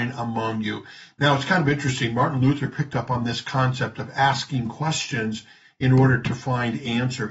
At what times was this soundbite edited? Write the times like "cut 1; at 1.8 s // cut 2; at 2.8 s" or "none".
none